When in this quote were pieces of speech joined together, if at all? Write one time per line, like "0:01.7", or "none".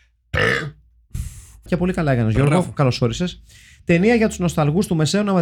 0:01.7